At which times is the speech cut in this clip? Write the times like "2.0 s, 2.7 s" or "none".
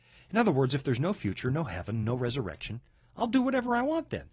none